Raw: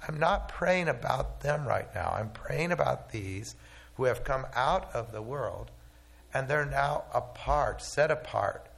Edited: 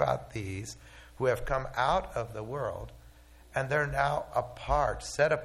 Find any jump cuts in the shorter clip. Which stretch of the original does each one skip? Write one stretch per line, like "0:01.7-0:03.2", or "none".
none